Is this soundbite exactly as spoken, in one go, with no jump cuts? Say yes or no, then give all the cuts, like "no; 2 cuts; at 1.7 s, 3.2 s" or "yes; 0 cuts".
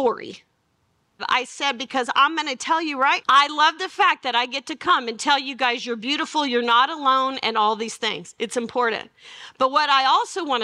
no; 2 cuts; at 1.2 s, 3.2 s